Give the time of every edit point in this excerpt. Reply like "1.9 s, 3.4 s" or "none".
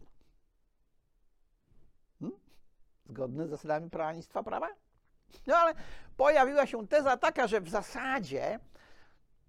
3.0 s

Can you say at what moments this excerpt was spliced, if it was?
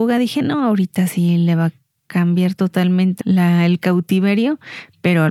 3.2 s

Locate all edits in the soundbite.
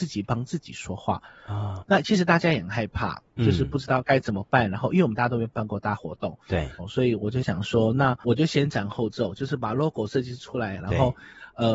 1.8 s, 6.8 s, 10.8 s

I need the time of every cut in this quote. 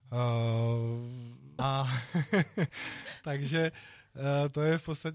1.6 s, 2.7 s

